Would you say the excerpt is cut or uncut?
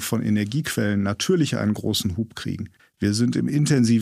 cut